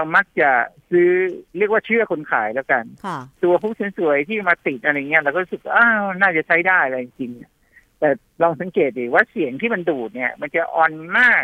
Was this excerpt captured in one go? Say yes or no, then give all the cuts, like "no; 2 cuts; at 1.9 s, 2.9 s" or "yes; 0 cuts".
no; 2 cuts; at 1.5 s, 3.3 s